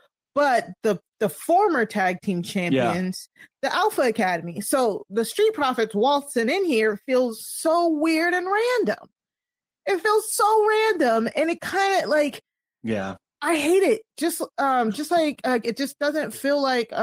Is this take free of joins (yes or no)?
no